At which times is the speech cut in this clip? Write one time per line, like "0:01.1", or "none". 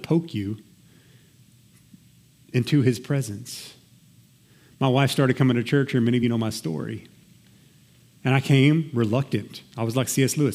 none